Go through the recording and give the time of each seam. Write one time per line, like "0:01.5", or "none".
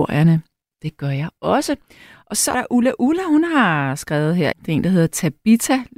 0:02.5
0:04.5